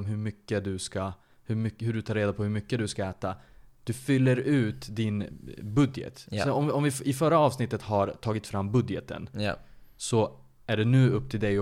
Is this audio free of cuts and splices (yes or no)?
yes